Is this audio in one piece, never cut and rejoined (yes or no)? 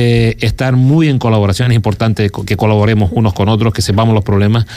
yes